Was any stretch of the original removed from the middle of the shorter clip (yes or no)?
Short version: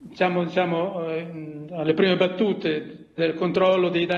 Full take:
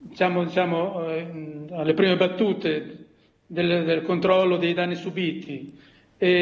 yes